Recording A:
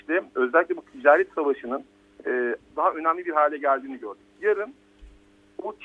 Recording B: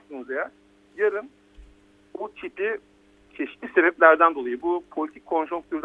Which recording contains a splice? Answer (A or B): A